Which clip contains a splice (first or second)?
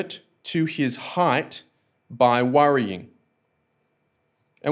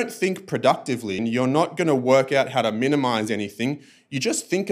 second